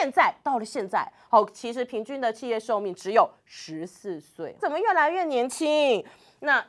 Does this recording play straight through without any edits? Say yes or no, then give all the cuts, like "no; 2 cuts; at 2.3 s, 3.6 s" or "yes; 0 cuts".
no; 1 cut; at 4.6 s